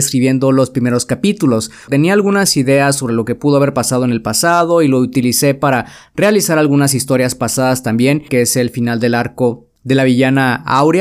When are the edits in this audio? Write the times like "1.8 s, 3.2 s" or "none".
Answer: 1.9 s, 8.3 s